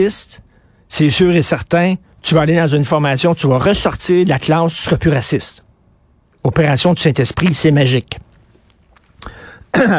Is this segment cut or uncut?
uncut